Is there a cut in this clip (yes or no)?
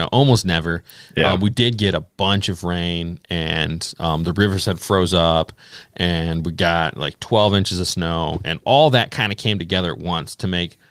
no